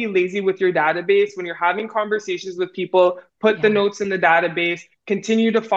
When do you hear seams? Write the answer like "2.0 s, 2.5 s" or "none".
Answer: none